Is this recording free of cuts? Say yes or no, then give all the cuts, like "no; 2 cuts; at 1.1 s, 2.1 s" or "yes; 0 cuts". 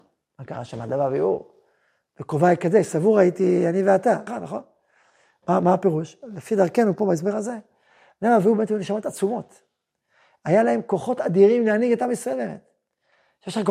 no; 1 cut; at 4.3 s